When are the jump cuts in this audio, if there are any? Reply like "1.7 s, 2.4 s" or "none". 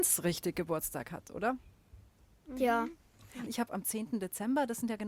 3.5 s